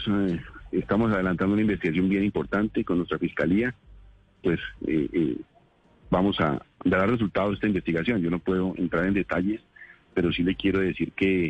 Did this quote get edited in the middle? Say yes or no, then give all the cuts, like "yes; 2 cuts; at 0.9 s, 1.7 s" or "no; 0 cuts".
yes; 1 cut; at 4.4 s